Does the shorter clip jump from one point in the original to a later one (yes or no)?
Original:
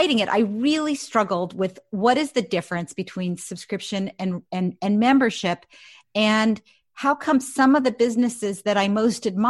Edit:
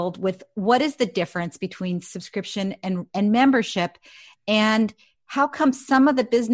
yes